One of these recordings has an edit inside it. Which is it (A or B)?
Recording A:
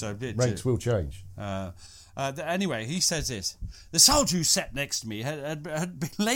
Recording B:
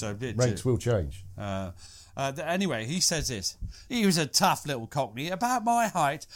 B